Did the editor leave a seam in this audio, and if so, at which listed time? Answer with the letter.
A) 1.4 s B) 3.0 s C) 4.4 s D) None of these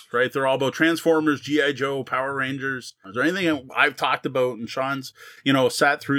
B